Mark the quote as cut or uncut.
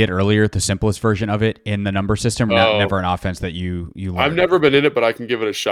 cut